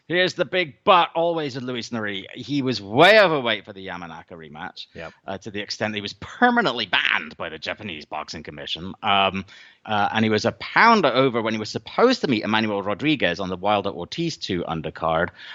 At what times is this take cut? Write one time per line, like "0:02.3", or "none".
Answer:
0:09.8